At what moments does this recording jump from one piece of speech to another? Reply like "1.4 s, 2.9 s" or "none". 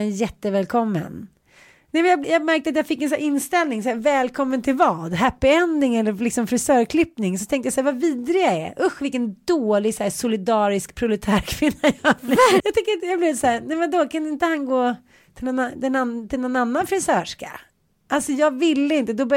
2.2 s, 12.6 s